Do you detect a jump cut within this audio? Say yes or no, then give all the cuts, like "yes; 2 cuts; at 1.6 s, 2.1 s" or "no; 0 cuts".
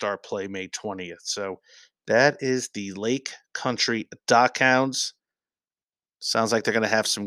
no; 0 cuts